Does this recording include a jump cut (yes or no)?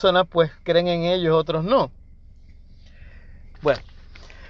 yes